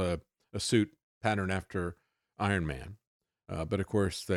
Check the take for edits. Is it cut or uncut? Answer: uncut